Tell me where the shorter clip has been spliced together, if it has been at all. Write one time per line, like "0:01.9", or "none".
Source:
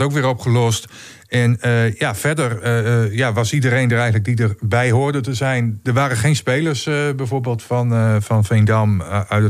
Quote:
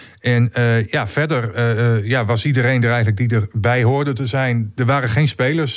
none